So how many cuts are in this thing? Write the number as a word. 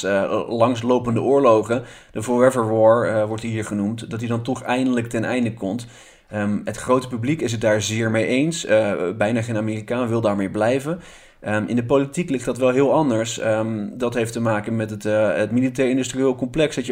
zero